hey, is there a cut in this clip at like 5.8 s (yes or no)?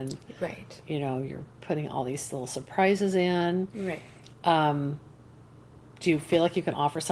yes